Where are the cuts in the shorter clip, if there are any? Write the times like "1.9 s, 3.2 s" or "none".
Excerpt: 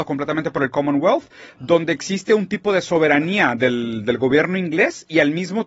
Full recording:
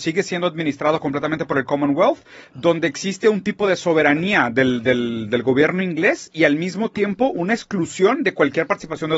3.6 s